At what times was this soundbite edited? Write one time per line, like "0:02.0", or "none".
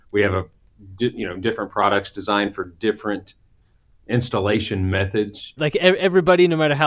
0:05.6

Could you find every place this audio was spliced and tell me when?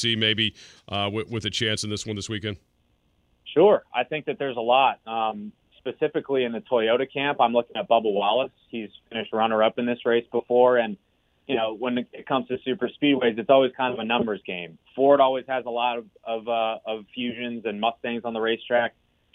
none

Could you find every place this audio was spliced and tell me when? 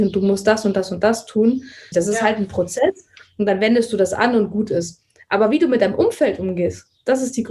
0:01.9
0:03.2

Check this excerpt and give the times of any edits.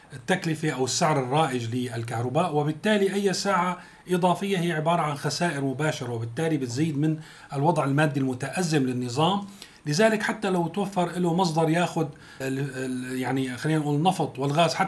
0:12.4

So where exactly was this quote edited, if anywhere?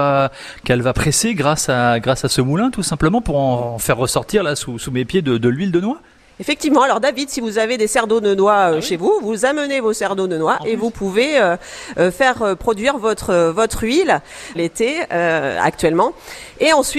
0:14.5

